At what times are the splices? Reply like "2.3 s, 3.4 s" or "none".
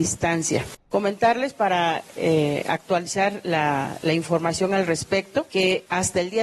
0.9 s